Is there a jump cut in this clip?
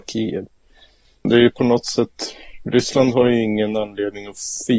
yes; 1 cut; at 1.3 s

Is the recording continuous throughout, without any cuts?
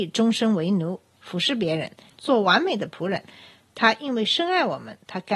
no; 1 cut; at 2.1 s

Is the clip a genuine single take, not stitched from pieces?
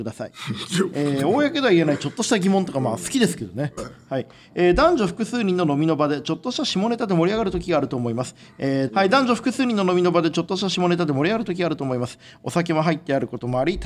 no; 2 cuts; at 3.8 s, 8.9 s

